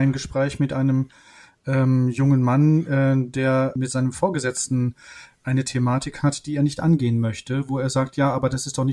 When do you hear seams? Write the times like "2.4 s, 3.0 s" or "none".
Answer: 3.8 s

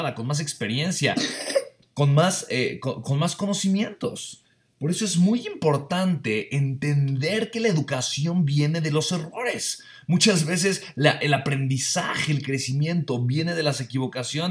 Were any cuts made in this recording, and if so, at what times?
3.0 s

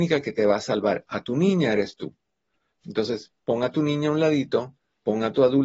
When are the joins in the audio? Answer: none

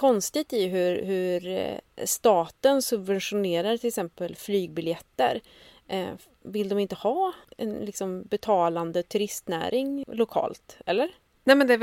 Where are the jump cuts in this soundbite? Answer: 6.4 s

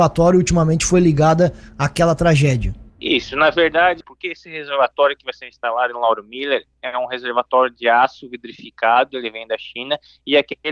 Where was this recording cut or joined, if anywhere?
2.9 s, 4.0 s, 9.1 s

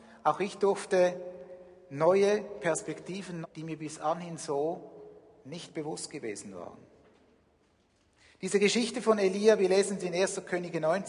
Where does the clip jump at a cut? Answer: 3.4 s

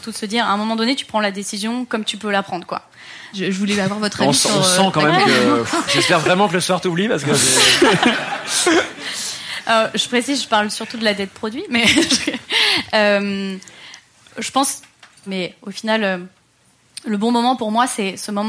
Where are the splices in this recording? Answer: 3.3 s, 5.9 s, 15.3 s

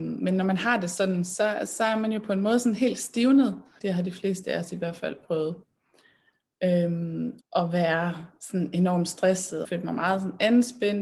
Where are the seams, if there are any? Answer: 3.8 s, 7.4 s, 9.6 s

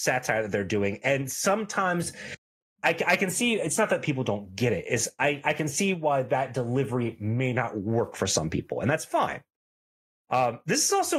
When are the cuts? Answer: none

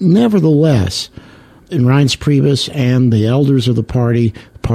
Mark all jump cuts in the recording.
1.7 s

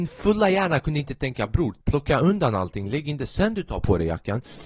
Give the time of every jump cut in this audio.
1.8 s

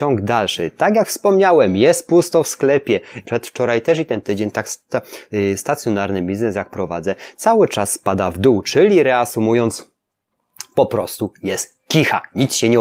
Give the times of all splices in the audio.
3.2 s

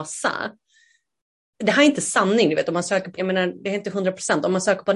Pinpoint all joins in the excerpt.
3.2 s

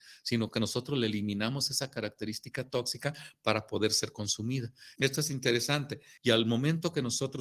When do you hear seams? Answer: 5.0 s, 6.2 s

